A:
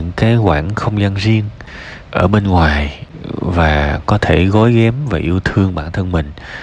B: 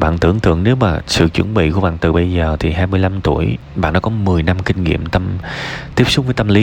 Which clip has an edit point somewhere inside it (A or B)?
A